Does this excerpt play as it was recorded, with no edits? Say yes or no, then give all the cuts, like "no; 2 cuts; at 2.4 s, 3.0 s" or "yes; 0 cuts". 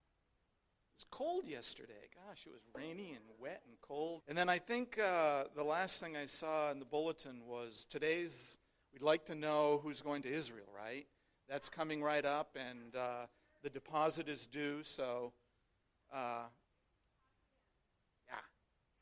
no; 1 cut; at 4.2 s